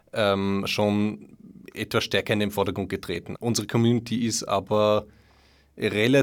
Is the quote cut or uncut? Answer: cut